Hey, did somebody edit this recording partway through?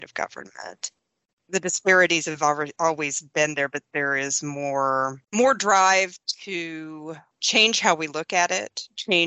yes; 2 cuts; at 1.4 s, 5.2 s

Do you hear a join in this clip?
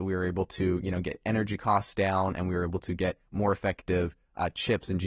no; 0 cuts

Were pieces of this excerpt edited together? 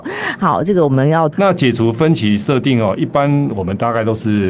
yes; 1 cut; at 1.3 s

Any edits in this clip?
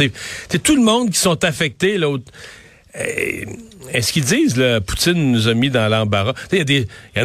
no; 0 cuts

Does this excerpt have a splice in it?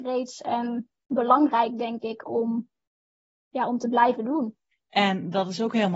yes; 1 cut; at 4.7 s

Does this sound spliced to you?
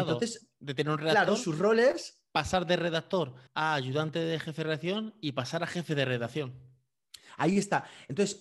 yes; 1 cut; at 3.5 s

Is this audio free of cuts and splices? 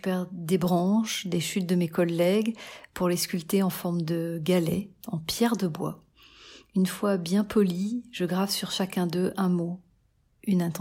yes; 0 cuts

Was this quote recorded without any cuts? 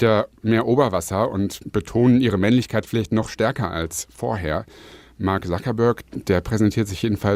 yes; 0 cuts

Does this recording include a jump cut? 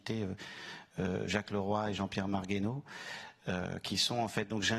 no; 0 cuts

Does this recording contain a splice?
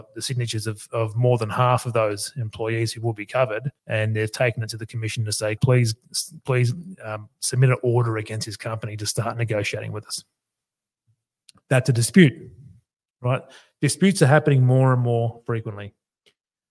yes; 2 cuts; at 3.8 s, 5.6 s

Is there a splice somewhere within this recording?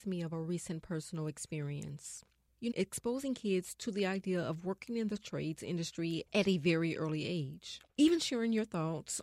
yes; 1 cut; at 2.7 s

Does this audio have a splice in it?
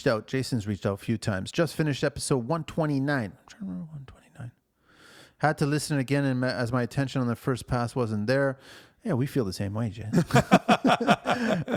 no; 0 cuts

